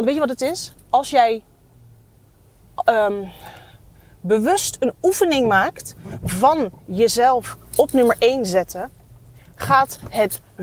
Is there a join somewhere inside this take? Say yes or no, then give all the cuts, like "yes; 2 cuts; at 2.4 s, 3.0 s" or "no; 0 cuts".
no; 0 cuts